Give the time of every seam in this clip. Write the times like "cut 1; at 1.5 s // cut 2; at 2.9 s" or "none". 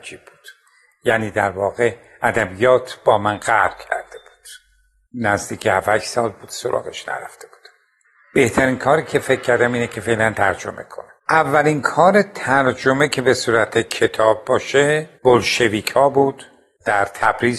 cut 1; at 11.2 s // cut 2; at 15.1 s